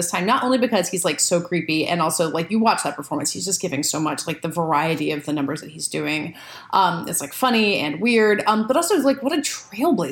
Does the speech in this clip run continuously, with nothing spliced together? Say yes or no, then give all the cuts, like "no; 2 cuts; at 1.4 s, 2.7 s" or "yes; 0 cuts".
yes; 0 cuts